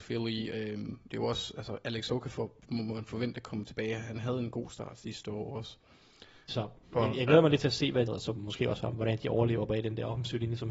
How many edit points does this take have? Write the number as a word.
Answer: three